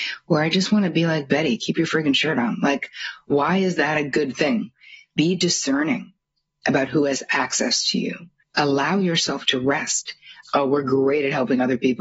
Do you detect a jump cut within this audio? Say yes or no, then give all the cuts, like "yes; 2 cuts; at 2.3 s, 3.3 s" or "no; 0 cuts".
yes; 2 cuts; at 8.4 s, 10.4 s